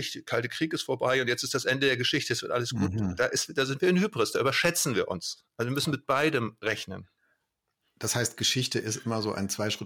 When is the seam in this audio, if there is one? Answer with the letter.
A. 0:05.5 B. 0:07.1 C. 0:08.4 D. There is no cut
D